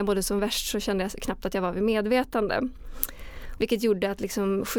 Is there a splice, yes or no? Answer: yes